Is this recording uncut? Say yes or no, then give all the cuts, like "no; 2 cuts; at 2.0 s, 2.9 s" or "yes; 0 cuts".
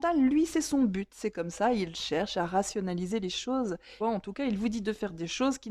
no; 1 cut; at 4.0 s